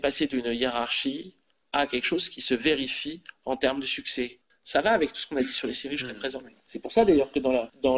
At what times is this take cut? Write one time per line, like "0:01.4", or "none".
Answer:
0:04.5
0:06.6